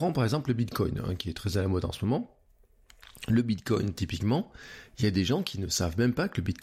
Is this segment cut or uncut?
uncut